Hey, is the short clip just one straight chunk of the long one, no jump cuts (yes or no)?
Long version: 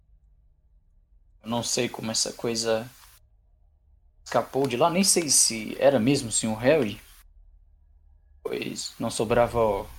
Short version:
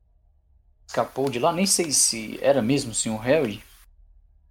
yes